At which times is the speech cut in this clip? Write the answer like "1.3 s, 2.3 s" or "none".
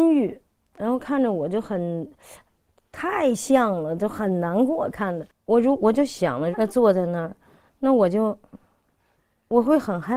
5.3 s, 6.5 s